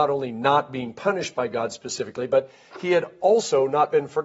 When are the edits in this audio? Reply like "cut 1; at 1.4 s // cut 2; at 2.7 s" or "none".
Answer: none